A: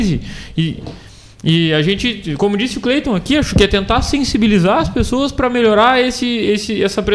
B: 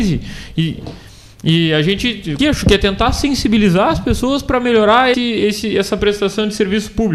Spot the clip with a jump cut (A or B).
B